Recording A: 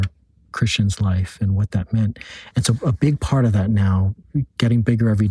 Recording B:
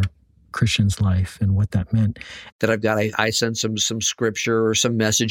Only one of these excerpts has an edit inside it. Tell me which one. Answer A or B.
B